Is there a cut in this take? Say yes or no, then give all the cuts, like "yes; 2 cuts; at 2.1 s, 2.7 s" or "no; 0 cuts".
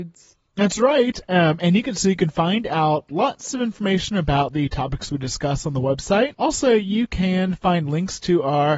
no; 0 cuts